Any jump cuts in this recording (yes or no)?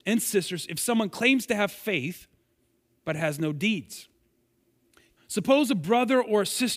yes